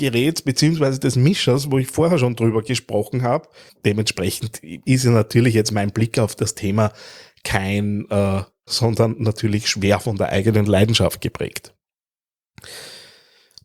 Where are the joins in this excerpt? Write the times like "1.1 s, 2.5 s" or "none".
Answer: 3.7 s, 8.7 s